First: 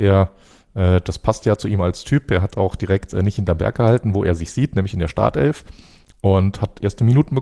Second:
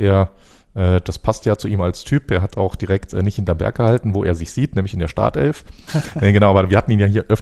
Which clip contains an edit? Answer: second; 1 cut; at 5.9 s

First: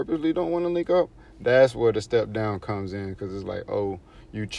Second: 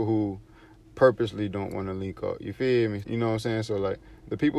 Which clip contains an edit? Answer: second; 1 cut; at 3.0 s

